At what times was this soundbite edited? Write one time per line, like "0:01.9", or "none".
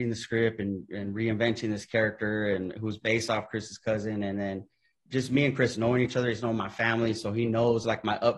none